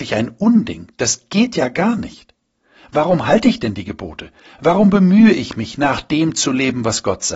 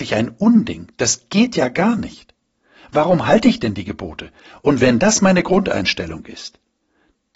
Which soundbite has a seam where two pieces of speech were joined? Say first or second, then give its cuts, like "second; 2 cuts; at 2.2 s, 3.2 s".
second; 1 cut; at 4.5 s